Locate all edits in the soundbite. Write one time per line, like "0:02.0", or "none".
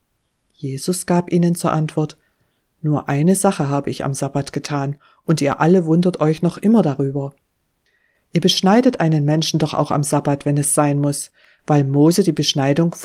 none

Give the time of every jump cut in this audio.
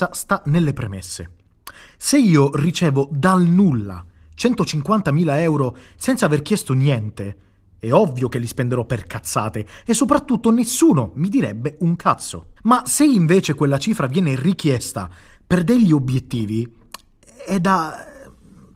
0:12.6

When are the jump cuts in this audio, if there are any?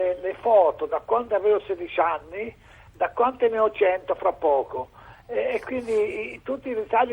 none

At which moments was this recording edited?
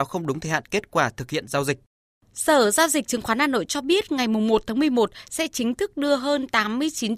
none

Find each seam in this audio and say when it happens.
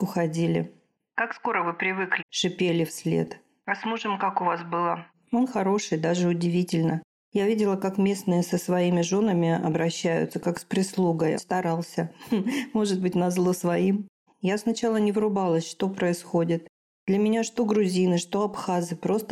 0:02.2
0:11.4
0:14.3

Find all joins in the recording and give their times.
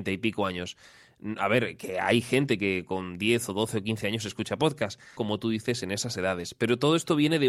0:05.2

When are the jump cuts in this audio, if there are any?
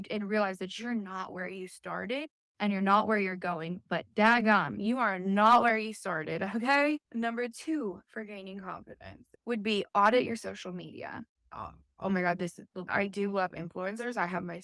0:11.5

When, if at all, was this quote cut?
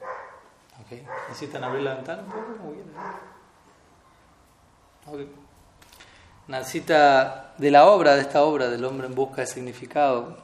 none

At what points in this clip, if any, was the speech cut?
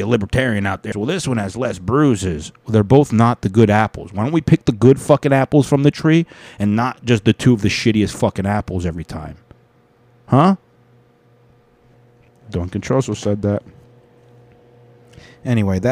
0:00.9

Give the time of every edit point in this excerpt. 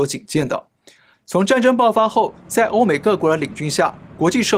0:01.1

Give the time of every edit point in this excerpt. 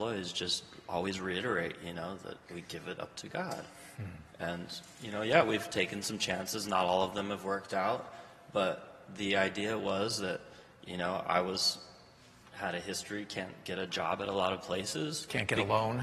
none

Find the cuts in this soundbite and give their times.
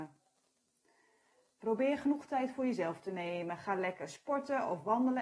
none

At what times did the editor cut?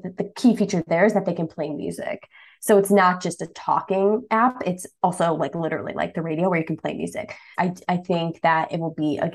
0:07.5

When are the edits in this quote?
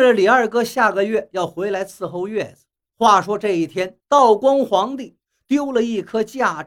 0:02.9
0:04.0

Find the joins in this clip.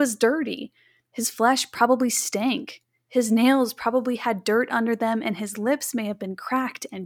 0:01.0

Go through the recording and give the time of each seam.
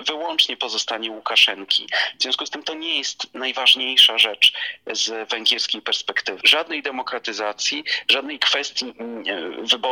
0:06.4

